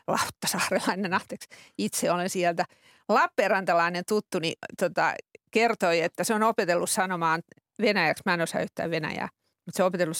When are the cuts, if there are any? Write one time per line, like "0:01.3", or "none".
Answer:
none